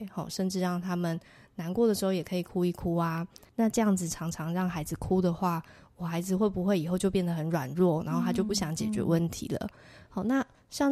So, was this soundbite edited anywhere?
yes; 1 cut; at 3.5 s

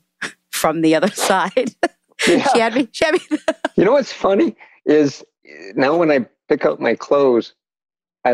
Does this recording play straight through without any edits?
no; 1 cut; at 3.7 s

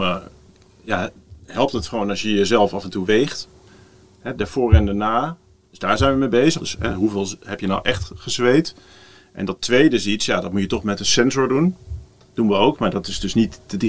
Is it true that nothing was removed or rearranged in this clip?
no; 1 cut; at 6.6 s

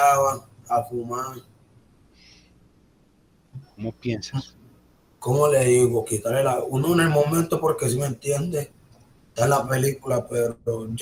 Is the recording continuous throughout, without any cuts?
no; 1 cut; at 3.6 s

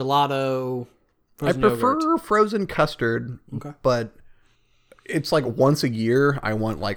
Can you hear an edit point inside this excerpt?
no; 0 cuts

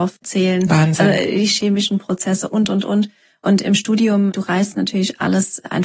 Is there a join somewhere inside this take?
no; 0 cuts

